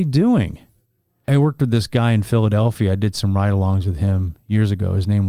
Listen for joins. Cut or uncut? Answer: cut